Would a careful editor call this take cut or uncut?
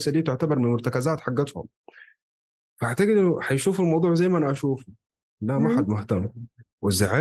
uncut